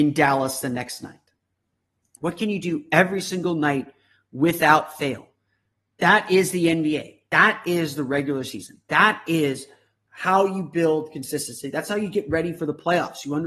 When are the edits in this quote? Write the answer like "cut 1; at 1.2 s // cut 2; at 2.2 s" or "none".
cut 1; at 2.2 s